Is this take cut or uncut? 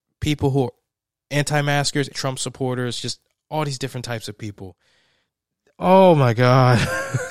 cut